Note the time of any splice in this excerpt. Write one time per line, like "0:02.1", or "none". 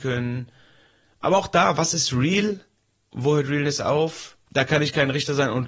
0:04.5